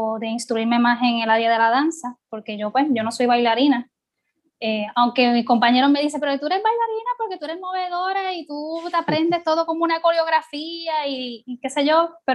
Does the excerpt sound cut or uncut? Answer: uncut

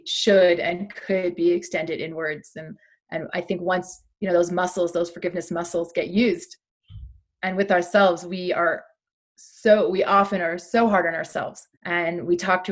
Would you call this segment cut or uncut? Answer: cut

